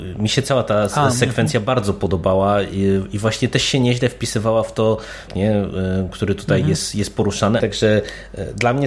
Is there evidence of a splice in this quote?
yes; 2 cuts; at 5.3 s, 7.6 s

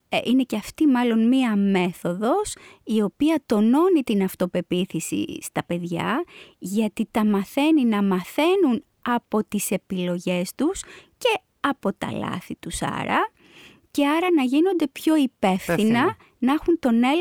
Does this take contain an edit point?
no; 0 cuts

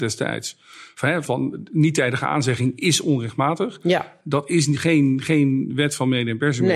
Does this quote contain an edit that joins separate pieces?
yes; 1 cut; at 1.3 s

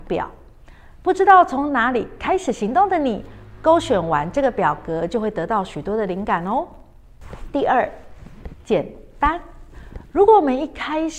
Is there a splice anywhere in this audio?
no; 0 cuts

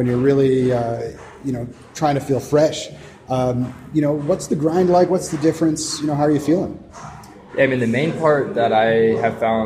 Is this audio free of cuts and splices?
yes; 0 cuts

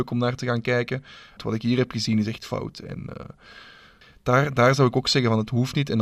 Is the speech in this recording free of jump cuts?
no; 1 cut; at 1.4 s

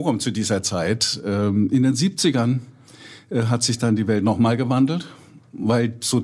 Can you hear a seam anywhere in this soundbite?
no; 0 cuts

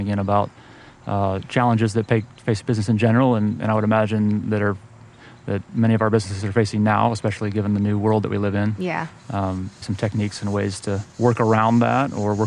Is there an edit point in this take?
yes; 2 cuts; at 9.8 s, 11.1 s

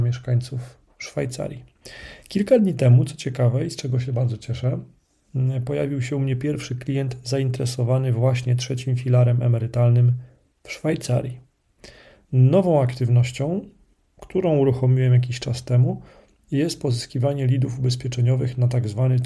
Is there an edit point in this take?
yes; 1 cut; at 12.2 s

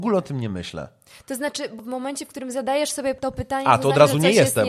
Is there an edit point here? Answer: no; 0 cuts

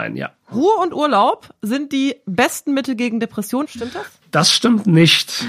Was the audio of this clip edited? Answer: yes; 1 cut; at 3.6 s

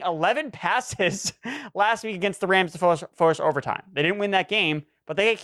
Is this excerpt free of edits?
yes; 0 cuts

